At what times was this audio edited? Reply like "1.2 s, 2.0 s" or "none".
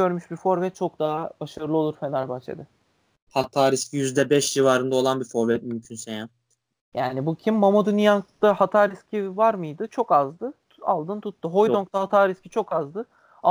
none